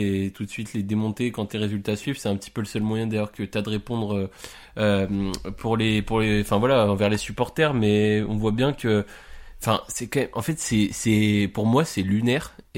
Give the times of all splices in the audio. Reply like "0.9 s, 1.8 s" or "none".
none